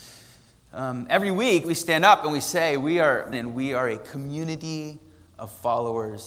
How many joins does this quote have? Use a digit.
2